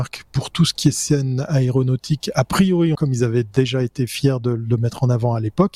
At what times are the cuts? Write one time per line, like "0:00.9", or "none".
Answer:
0:02.9